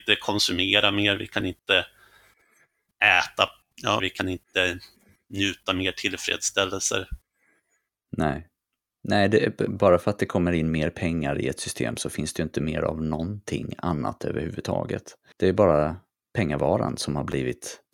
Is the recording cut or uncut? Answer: cut